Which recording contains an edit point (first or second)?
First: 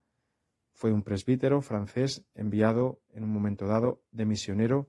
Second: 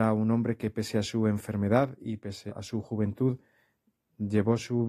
second